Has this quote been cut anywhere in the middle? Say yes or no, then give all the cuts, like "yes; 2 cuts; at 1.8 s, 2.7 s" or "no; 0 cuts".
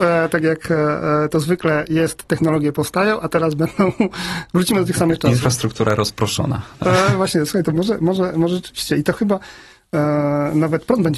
no; 0 cuts